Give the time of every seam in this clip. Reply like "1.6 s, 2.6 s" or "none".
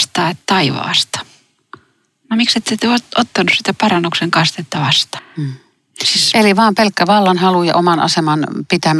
5.2 s